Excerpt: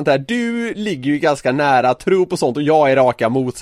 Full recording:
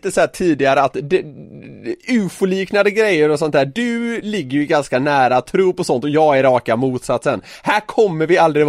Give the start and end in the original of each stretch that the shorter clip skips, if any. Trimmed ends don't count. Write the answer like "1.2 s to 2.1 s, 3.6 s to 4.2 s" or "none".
none